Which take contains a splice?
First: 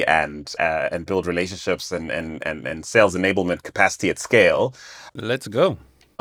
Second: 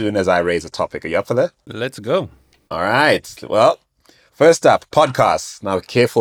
first; 1 cut; at 5.1 s

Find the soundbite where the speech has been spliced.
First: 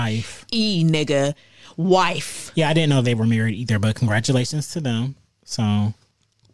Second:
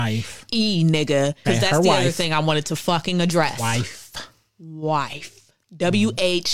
second; 2 cuts; at 1.4 s, 3.6 s

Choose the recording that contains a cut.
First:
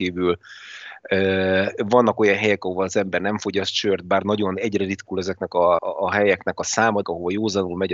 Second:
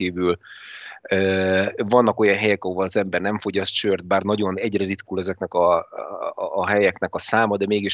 first; 2 cuts; at 5.8 s, 7.0 s

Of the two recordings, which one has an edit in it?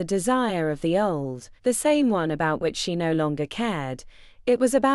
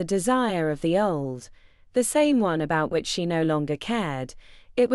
first; 1 cut; at 1.6 s

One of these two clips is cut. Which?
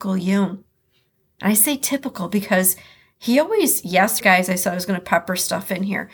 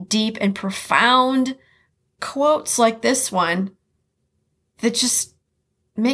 first; 1 cut; at 4.2 s

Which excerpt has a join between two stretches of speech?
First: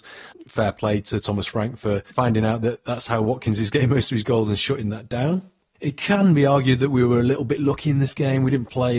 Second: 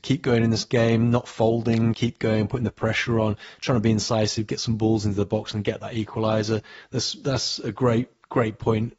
second; 1 cut; at 1.9 s

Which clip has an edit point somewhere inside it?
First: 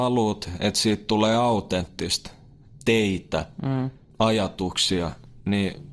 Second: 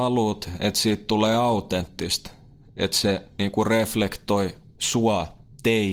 first; 1 cut; at 2.7 s

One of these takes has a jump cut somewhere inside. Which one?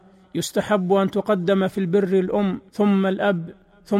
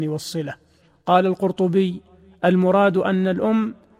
first; 1 cut; at 2.7 s

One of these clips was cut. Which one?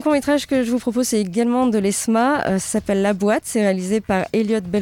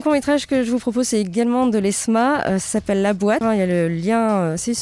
second; 1 cut; at 3.4 s

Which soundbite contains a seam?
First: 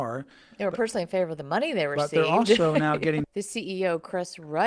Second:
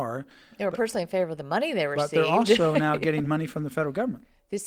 first; 1 cut; at 3.2 s

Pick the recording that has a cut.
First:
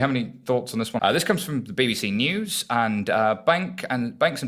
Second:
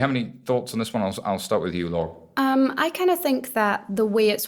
first; 1 cut; at 1.0 s

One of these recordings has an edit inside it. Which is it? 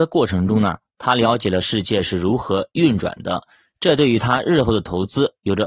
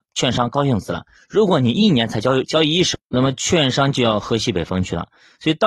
second; 1 cut; at 3.0 s

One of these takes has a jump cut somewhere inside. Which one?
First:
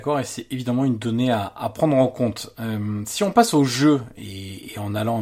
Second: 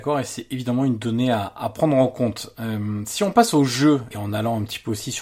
second; 1 cut; at 4.1 s

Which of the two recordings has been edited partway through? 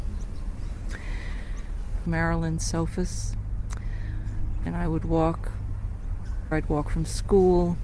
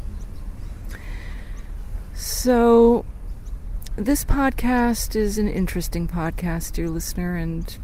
first; 3 cuts; at 2.1 s, 4.7 s, 6.5 s

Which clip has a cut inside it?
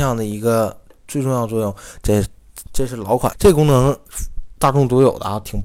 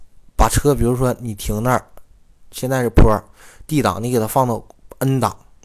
first; 2 cuts; at 2.0 s, 3.3 s

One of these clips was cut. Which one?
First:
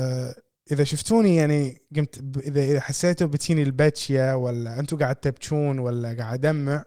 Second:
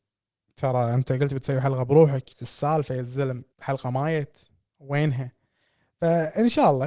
second; 2 cuts; at 2.3 s, 3.5 s

